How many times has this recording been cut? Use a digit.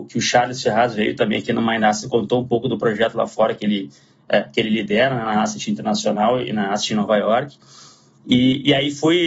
0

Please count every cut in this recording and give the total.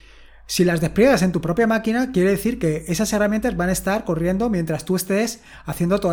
0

